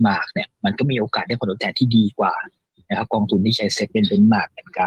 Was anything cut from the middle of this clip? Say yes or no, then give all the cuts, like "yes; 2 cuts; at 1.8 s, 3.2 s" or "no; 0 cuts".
no; 0 cuts